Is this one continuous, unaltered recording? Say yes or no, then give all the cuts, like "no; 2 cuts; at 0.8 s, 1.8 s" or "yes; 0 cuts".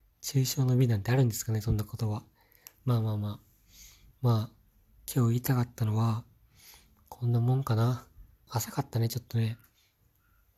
no; 2 cuts; at 4.1 s, 8.5 s